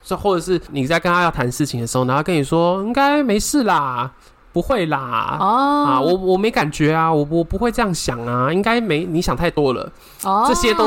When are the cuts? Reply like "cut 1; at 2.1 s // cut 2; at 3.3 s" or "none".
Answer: none